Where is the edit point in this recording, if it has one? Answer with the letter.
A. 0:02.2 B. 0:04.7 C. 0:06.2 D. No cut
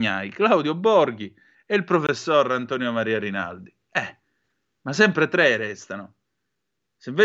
D